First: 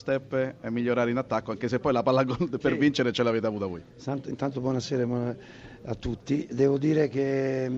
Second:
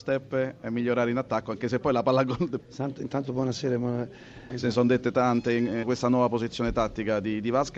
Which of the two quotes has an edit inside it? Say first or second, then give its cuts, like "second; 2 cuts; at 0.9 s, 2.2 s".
second; 3 cuts; at 2.6 s, 4.5 s, 5.8 s